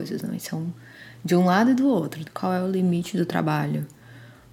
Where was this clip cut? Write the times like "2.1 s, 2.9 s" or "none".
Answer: 2.3 s